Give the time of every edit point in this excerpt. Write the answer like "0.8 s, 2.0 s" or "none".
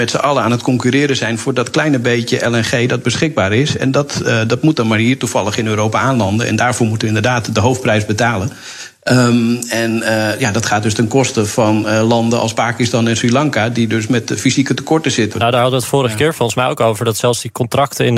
15.3 s